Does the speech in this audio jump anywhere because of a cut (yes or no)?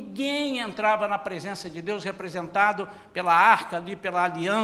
no